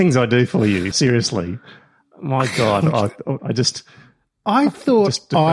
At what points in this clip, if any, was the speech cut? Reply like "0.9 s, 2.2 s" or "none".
0.9 s, 3.4 s